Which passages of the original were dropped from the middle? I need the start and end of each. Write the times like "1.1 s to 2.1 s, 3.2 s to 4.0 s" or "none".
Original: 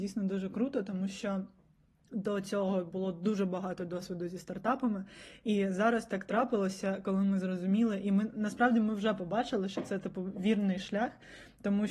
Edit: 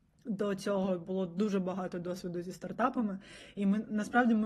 5.4 s to 8.0 s